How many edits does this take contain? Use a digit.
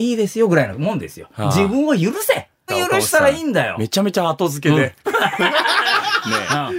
1